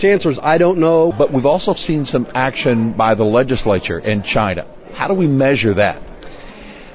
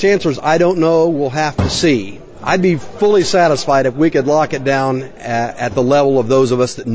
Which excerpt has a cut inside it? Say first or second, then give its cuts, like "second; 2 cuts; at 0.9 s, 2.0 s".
first; 1 cut; at 1.1 s